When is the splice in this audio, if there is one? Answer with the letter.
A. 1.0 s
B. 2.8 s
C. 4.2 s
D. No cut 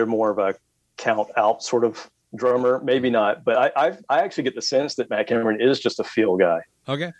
D